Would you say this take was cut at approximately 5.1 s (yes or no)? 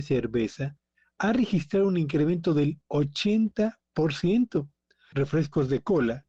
yes